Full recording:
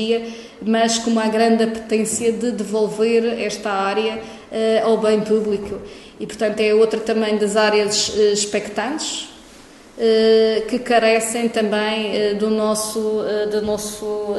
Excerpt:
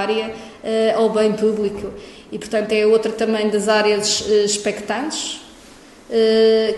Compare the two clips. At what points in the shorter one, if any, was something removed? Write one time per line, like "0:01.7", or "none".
none